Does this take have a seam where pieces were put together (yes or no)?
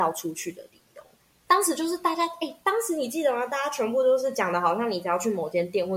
no